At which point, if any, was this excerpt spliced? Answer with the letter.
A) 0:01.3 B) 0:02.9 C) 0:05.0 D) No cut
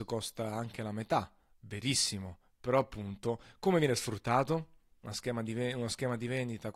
C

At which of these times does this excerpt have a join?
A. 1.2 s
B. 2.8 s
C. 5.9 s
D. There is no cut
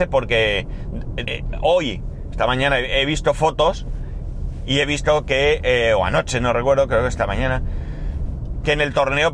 A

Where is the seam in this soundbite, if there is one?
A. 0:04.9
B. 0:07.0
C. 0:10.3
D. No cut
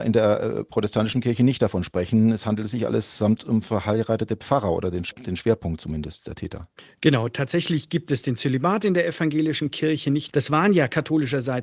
C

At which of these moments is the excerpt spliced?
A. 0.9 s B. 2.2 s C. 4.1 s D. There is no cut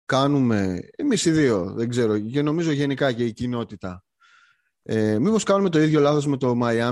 D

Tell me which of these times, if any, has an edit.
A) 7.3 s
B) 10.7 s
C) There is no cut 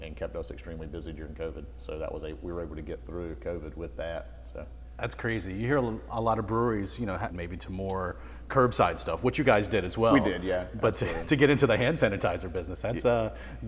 A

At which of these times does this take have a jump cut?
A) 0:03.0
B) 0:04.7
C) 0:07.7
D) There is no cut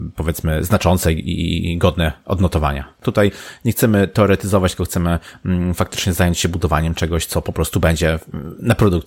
A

